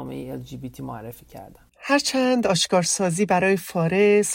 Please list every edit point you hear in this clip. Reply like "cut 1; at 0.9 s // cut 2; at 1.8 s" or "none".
cut 1; at 1.7 s